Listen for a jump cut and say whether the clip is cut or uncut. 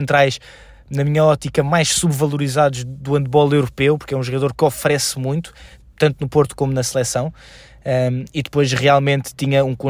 uncut